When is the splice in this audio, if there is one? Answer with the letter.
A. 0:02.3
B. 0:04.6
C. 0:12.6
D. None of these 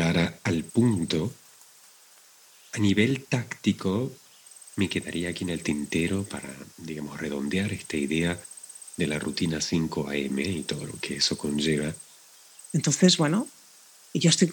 C